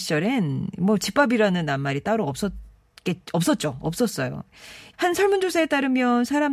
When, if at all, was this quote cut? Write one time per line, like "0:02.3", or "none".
0:04.9